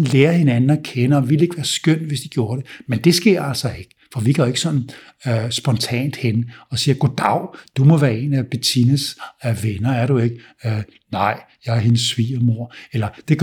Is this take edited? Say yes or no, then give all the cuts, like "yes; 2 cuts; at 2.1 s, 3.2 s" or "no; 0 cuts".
no; 0 cuts